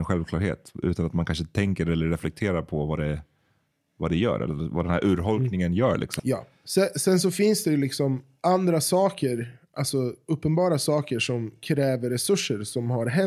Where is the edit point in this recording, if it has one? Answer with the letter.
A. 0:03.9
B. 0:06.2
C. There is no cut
B